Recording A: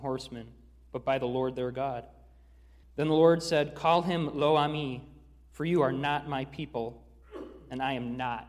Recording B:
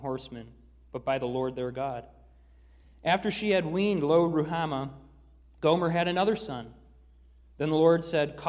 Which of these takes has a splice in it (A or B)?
A